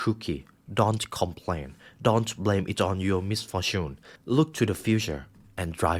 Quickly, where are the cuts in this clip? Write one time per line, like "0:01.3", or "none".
0:04.2